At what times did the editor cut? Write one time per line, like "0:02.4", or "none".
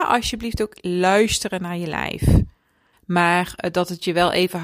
0:02.9